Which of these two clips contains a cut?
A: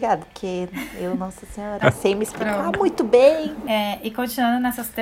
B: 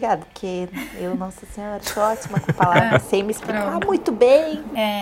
A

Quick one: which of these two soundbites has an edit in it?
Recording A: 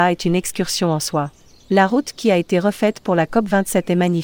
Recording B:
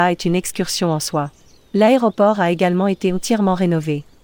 B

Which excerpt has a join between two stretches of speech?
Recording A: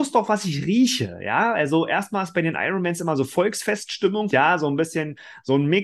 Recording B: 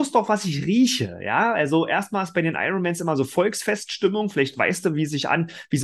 A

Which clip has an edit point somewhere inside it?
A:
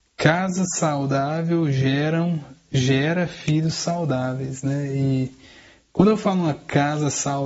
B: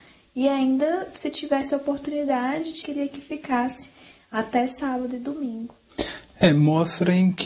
B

